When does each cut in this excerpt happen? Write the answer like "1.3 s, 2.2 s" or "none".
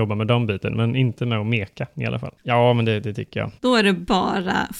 2.4 s, 3.6 s